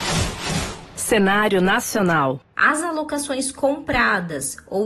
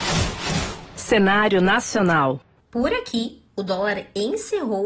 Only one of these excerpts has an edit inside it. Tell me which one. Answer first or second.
first